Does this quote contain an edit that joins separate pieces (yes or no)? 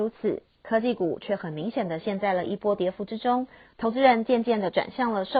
no